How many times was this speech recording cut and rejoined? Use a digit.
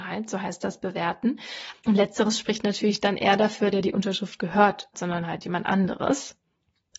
3